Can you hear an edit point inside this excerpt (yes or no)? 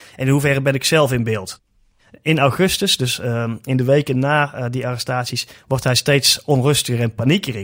no